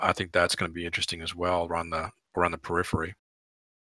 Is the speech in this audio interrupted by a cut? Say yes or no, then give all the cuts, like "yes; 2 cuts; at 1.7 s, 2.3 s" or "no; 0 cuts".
no; 0 cuts